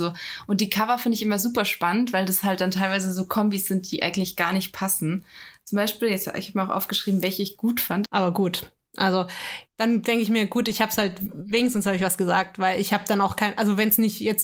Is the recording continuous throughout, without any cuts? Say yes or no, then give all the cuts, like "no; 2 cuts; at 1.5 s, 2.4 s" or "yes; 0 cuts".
no; 1 cut; at 8.0 s